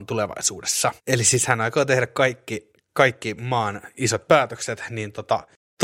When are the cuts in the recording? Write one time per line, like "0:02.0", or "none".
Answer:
0:01.0